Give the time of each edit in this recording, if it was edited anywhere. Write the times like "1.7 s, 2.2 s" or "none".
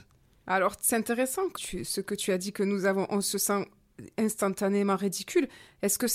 1.5 s